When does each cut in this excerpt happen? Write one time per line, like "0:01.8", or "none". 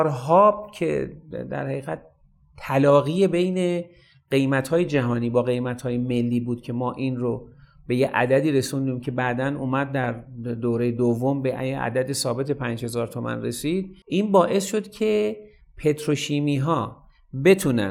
0:14.0